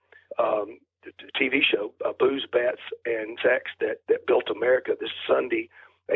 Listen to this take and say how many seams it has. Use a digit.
1